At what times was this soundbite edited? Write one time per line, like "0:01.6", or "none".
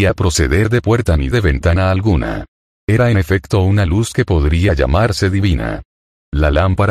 0:02.7